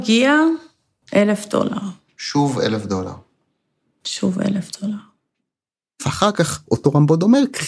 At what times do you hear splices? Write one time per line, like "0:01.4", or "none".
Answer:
0:01.0